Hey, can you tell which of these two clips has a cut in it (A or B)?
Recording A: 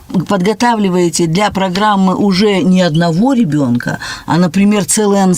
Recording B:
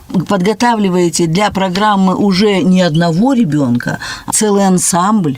B